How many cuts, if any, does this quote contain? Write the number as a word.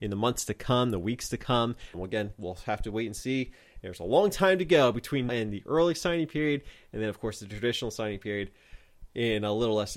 two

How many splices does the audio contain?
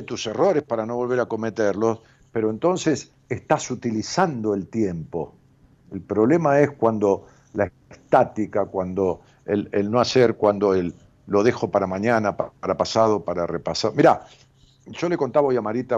zero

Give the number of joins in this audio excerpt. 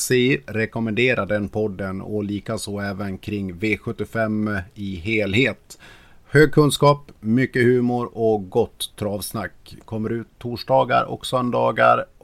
one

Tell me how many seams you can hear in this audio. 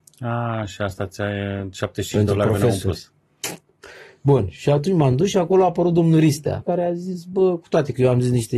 one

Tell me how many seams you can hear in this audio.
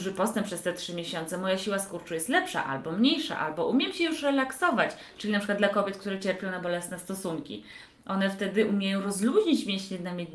zero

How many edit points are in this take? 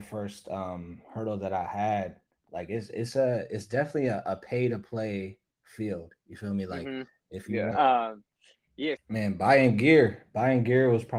two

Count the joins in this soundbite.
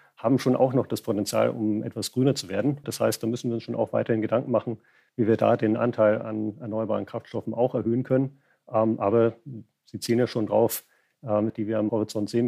two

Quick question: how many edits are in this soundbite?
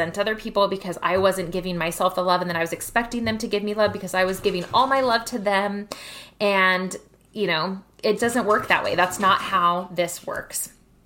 one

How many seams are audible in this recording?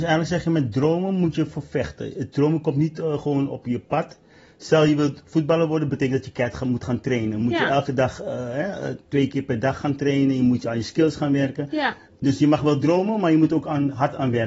zero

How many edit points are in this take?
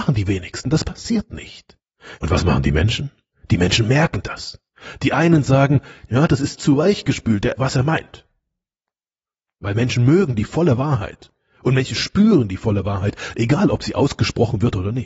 three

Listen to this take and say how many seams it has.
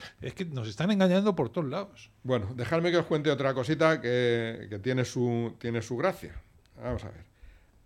zero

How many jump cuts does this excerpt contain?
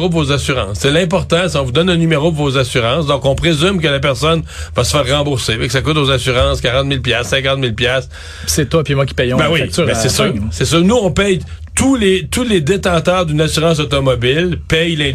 zero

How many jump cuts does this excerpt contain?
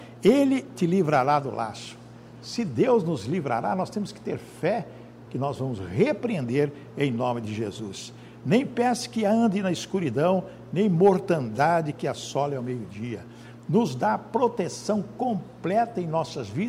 one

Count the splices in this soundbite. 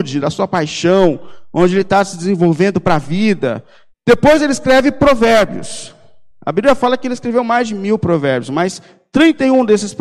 one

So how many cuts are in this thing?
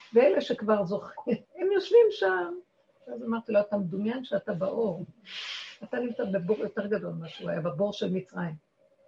two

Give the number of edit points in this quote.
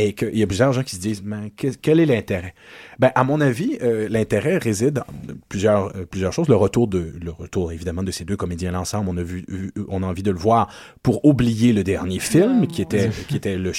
zero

